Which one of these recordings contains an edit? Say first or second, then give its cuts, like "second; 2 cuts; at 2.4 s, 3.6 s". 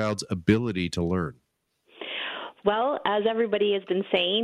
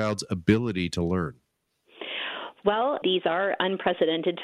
second; 1 cut; at 3.0 s